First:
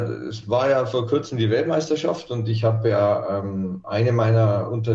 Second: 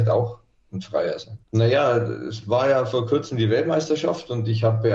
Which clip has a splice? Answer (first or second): second